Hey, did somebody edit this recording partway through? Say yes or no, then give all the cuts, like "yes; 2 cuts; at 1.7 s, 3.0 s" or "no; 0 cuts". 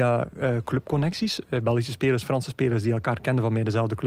no; 0 cuts